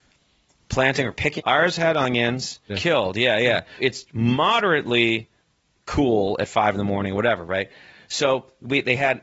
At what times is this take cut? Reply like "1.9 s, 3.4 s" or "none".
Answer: 1.4 s, 2.7 s, 3.8 s